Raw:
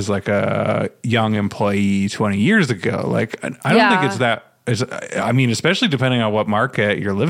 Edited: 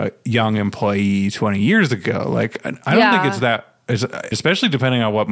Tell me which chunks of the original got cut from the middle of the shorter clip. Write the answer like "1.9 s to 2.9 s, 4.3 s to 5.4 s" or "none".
5.1 s to 5.5 s